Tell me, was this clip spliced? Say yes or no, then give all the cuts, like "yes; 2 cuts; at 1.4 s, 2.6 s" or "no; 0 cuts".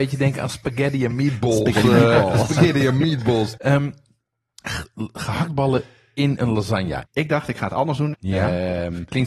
yes; 3 cuts; at 3.6 s, 7.0 s, 8.1 s